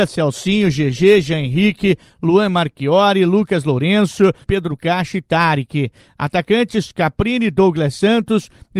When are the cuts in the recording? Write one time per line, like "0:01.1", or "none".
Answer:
0:04.4